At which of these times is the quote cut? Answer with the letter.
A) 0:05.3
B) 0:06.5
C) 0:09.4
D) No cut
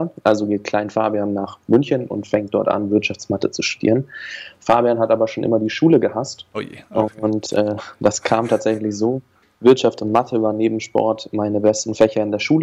B